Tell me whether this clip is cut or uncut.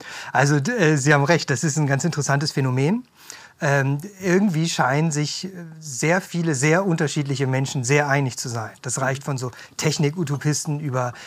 uncut